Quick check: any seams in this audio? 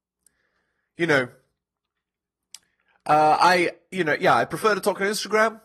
no; 0 cuts

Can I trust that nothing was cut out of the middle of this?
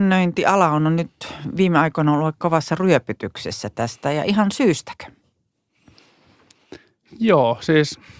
yes; 0 cuts

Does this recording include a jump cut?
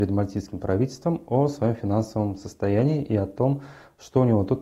no; 0 cuts

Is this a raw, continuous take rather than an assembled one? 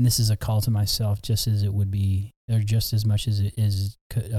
yes; 0 cuts

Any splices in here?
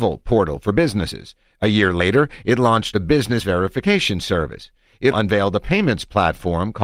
yes; 1 cut; at 5.1 s

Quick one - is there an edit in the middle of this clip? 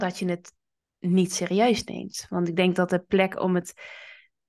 no; 0 cuts

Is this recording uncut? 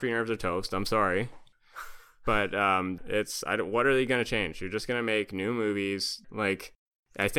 no; 2 cuts; at 3.0 s, 6.2 s

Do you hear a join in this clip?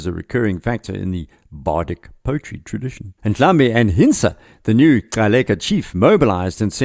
yes; 1 cut; at 3.2 s

